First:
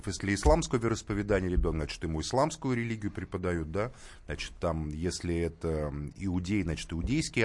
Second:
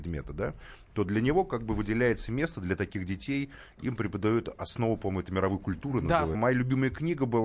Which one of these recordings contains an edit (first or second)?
second